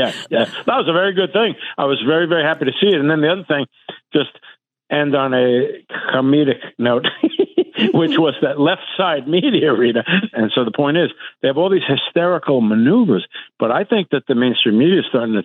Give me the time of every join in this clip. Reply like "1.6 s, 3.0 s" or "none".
10.3 s